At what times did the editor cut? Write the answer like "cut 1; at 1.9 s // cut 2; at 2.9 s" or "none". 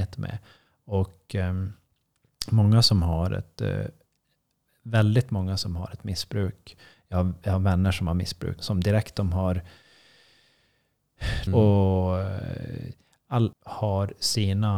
cut 1; at 8.6 s // cut 2; at 11.5 s // cut 3; at 13.5 s